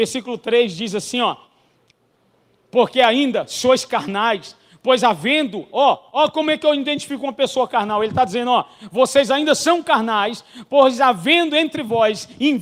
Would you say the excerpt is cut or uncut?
uncut